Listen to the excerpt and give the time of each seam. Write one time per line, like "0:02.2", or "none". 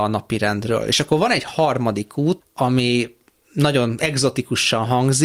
0:02.4